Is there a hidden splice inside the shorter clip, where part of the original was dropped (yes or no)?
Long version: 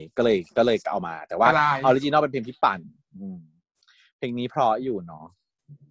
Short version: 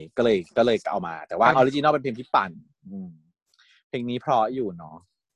yes